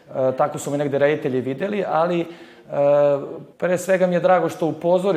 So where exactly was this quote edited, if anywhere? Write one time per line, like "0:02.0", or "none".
0:03.5